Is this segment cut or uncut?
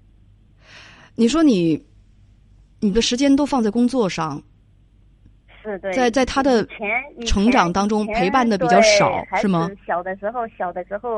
uncut